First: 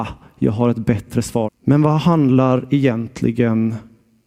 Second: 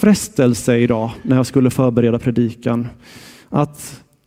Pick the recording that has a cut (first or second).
first